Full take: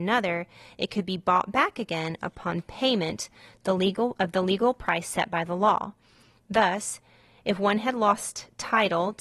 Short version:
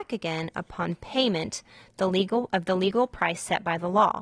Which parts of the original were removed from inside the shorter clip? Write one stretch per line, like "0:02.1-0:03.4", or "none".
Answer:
none